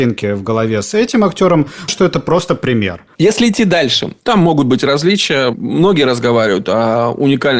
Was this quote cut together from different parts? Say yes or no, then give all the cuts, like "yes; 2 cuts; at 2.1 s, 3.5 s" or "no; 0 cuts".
yes; 1 cut; at 1.9 s